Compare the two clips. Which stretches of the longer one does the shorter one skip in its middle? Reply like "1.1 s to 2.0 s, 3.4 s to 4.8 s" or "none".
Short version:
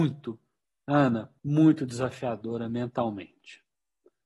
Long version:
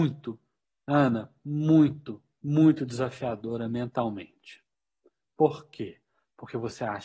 1.4 s to 2.4 s